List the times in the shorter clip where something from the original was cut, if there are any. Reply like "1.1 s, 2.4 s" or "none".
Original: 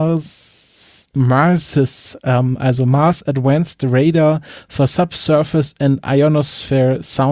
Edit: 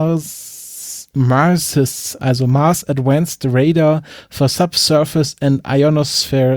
2.2 s